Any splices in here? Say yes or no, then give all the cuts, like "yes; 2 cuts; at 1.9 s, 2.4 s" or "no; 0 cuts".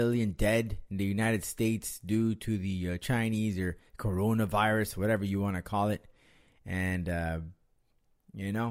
no; 0 cuts